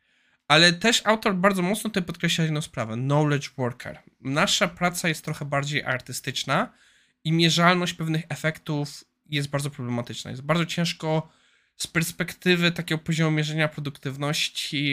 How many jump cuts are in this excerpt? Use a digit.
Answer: 0